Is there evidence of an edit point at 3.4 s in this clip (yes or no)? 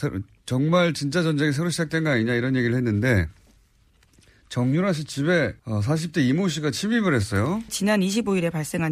no